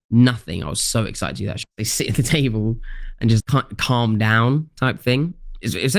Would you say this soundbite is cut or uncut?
cut